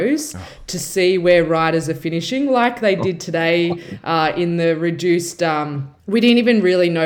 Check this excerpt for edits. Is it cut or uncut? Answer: cut